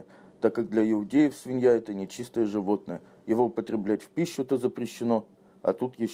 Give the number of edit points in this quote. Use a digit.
0